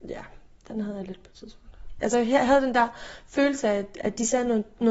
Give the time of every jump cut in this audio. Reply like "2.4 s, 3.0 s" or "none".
2.0 s